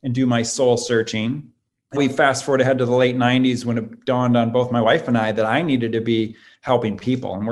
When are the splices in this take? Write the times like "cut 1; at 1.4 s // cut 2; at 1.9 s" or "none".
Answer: cut 1; at 2.0 s